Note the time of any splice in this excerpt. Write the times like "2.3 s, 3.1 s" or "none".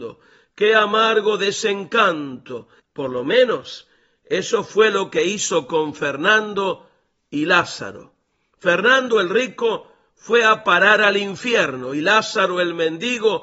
2.8 s